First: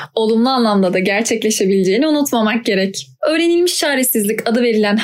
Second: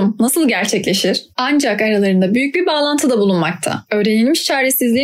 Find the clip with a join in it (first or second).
second